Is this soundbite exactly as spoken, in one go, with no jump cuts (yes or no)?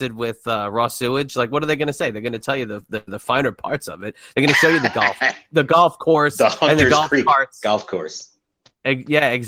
yes